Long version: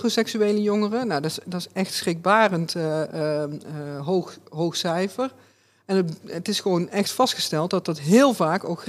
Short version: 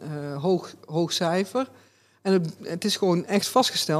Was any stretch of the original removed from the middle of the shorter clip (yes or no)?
no